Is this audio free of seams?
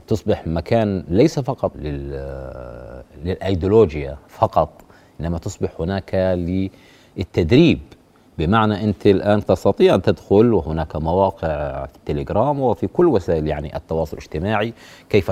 no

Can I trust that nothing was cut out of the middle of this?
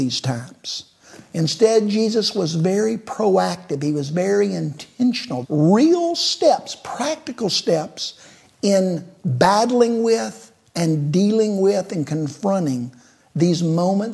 no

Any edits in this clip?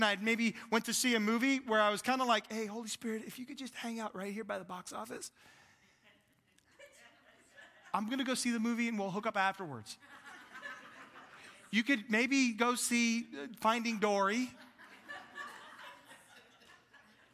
no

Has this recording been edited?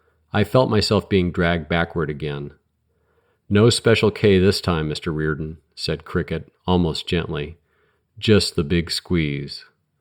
no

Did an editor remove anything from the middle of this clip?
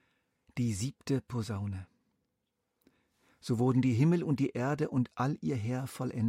no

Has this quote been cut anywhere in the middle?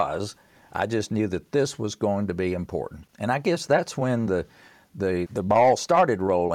yes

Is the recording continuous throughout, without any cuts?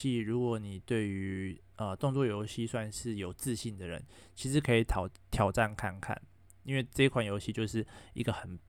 yes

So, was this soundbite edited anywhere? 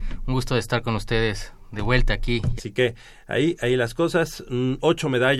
yes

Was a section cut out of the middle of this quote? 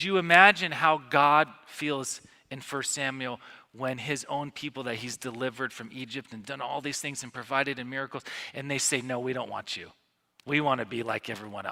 no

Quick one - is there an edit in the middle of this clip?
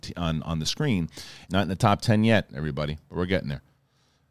yes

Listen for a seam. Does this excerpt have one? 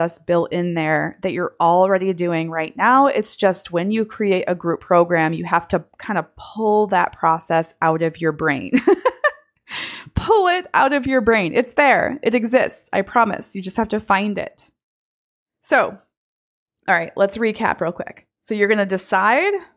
yes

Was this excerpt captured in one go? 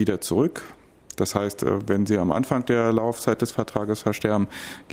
yes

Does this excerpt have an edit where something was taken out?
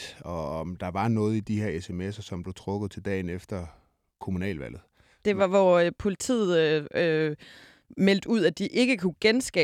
no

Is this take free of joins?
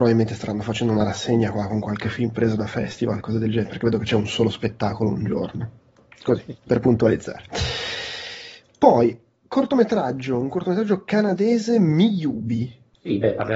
yes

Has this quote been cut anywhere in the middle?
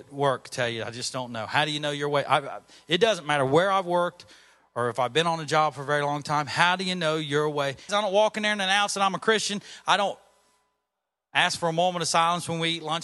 yes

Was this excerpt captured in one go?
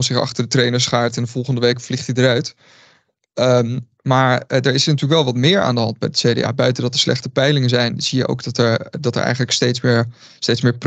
yes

